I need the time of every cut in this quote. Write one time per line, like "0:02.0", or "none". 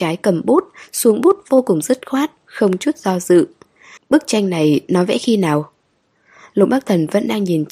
0:02.4
0:04.0